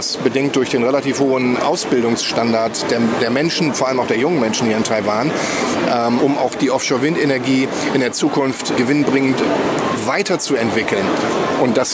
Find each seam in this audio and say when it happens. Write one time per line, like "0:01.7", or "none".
0:06.2
0:08.8